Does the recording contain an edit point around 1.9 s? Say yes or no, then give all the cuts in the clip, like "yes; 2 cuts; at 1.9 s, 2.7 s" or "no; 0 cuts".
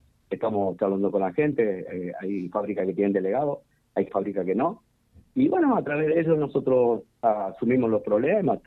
no; 1 cut; at 4.1 s